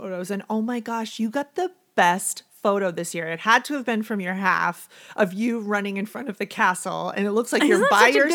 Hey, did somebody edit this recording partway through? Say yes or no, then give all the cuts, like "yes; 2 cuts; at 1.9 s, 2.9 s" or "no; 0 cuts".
no; 0 cuts